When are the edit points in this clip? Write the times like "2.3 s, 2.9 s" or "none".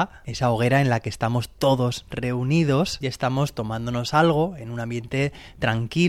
3.0 s